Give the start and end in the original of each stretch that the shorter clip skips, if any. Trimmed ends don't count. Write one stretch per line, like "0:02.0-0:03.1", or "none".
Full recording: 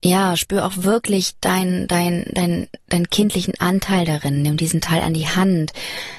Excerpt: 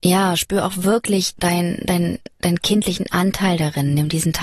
0:01.4-0:01.9

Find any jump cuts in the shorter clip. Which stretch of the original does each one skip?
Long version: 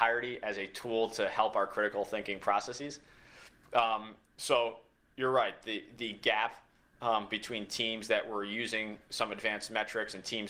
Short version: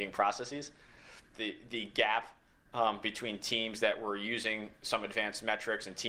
0:03.6-0:05.6

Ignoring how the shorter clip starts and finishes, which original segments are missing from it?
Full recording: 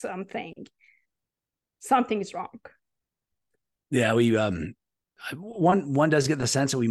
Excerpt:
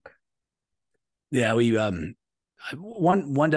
none

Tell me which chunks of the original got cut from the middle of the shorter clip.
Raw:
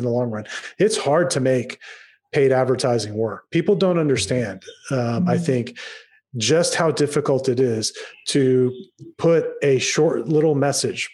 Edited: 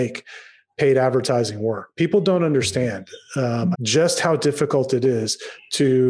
0:05.3-0:06.3

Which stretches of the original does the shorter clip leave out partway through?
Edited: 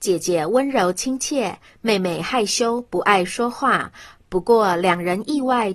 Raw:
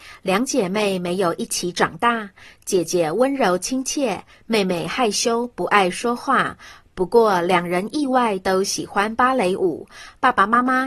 none

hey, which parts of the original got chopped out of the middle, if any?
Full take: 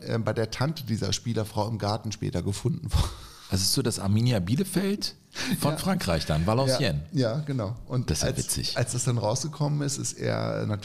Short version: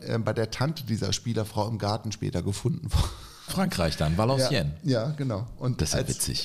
0:03.5-0:05.8

